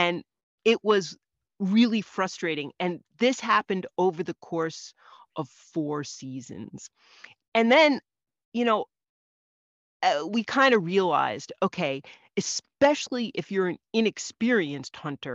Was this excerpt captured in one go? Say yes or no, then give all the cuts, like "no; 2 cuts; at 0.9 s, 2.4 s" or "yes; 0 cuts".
yes; 0 cuts